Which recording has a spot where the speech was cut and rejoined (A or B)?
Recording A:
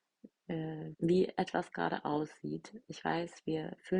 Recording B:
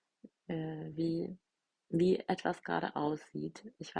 A